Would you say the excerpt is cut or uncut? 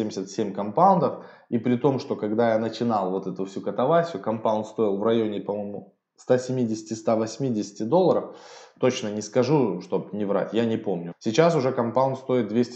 cut